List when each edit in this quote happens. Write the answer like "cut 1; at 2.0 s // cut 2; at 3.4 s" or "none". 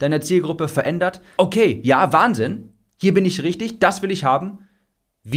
cut 1; at 1.4 s

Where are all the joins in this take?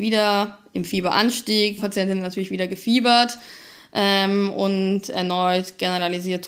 cut 1; at 1.8 s

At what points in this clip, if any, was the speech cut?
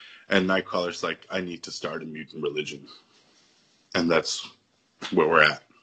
none

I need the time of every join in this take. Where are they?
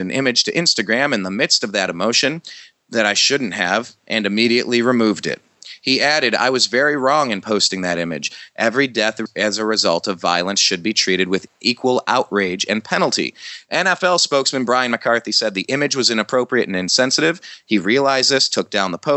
cut 1; at 8.5 s

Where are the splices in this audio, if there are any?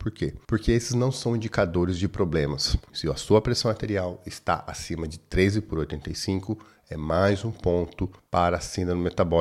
cut 1; at 2.9 s

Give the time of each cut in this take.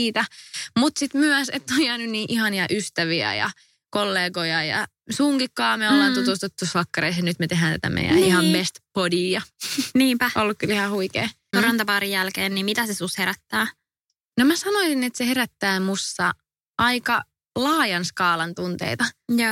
cut 1; at 11.5 s

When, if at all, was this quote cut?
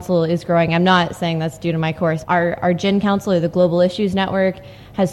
cut 1; at 2.2 s

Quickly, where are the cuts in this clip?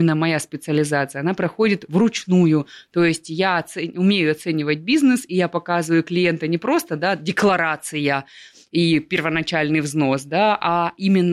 none

